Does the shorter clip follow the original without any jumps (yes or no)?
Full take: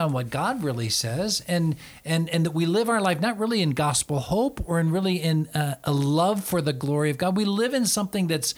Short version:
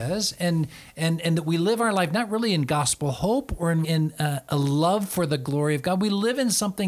no